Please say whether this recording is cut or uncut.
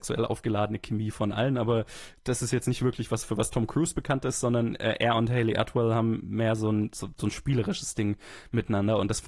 uncut